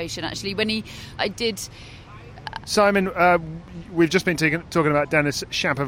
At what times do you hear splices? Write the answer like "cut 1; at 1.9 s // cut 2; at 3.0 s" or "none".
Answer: cut 1; at 1.2 s // cut 2; at 2.6 s